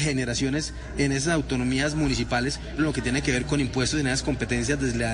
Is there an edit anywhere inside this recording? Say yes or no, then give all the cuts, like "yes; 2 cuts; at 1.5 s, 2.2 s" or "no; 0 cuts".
yes; 1 cut; at 2.8 s